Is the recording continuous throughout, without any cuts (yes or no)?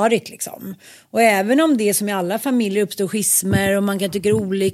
yes